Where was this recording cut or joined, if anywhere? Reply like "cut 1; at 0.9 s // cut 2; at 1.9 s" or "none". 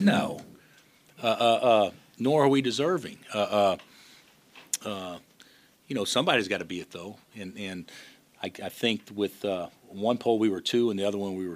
none